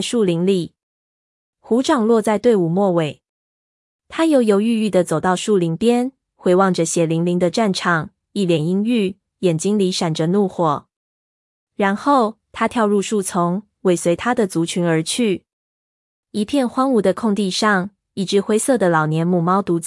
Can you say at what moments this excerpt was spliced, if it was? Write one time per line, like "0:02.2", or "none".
none